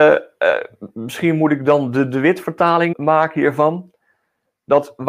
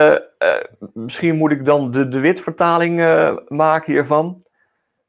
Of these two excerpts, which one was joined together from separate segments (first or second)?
first